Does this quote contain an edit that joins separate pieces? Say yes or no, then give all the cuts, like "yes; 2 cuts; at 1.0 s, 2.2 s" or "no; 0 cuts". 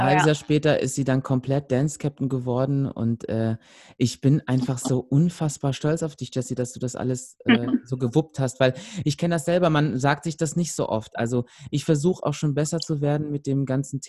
no; 0 cuts